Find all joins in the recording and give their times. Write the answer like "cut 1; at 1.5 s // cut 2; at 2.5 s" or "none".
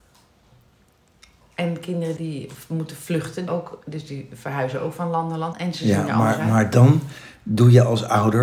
cut 1; at 2.2 s // cut 2; at 3.5 s // cut 3; at 5.5 s